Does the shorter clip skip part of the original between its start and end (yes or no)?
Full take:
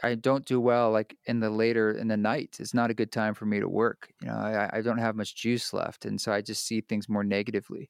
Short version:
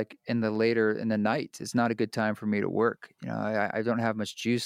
no